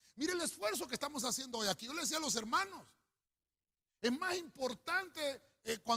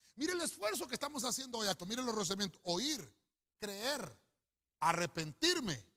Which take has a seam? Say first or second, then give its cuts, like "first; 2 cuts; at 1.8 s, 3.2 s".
second; 1 cut; at 1.8 s